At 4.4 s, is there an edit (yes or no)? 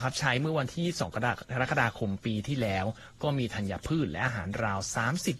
no